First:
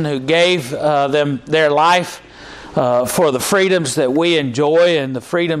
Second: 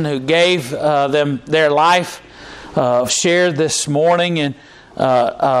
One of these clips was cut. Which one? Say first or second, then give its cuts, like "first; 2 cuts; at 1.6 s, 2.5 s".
second; 1 cut; at 3.1 s